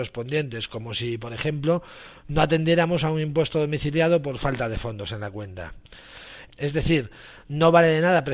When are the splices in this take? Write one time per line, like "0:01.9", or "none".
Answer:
0:06.5

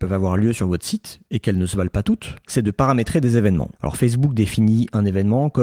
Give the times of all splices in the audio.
none

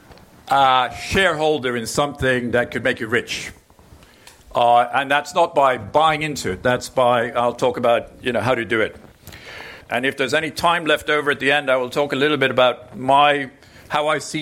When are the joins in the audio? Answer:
0:09.8

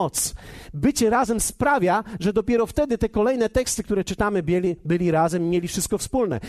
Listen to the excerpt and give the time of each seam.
none

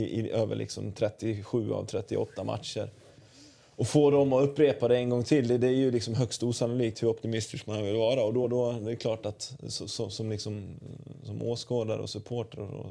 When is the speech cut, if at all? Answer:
none

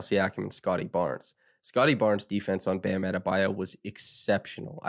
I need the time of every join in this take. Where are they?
none

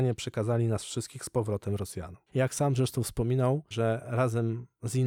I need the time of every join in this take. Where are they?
0:02.3
0:03.7

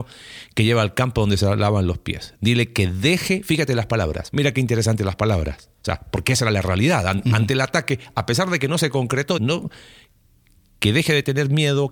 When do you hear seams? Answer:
0:04.3
0:09.4

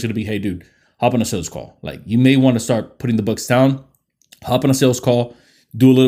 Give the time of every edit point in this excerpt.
none

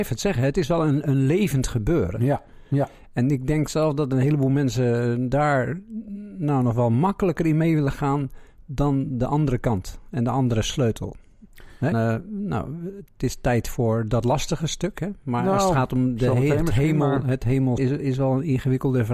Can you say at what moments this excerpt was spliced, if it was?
0:11.9
0:17.8

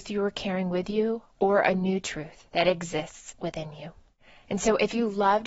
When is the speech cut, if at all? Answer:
0:01.3
0:02.5

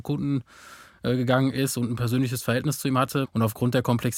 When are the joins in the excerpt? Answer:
0:03.2

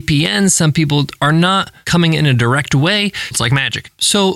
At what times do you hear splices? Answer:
0:03.3

